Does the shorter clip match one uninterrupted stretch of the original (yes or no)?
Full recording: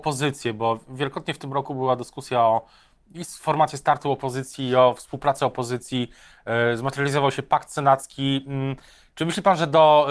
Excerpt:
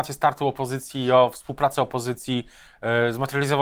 yes